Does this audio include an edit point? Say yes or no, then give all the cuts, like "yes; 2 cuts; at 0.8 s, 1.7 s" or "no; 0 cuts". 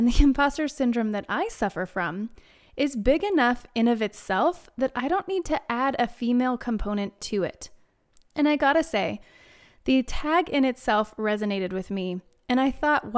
yes; 1 cut; at 8.3 s